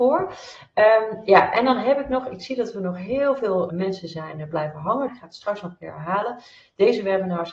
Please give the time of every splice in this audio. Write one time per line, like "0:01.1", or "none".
0:03.7
0:05.1